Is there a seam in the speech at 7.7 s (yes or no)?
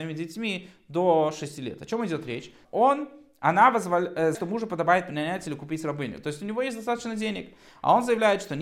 no